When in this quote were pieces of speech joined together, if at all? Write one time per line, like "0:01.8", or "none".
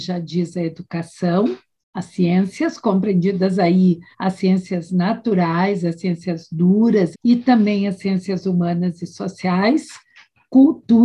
0:04.1
0:07.1